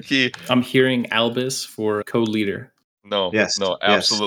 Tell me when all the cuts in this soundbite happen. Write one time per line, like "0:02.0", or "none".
0:02.0